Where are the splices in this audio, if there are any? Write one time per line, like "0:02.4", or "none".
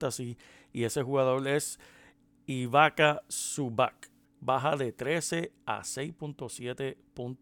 0:04.4

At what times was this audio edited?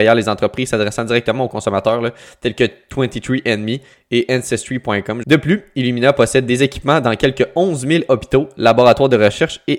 0:05.2

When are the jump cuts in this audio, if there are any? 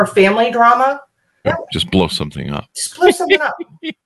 0:01.4

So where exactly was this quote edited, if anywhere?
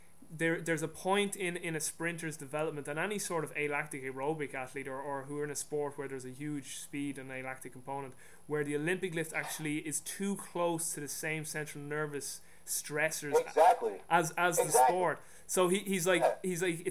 none

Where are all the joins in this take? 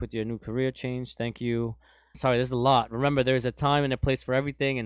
0:02.1

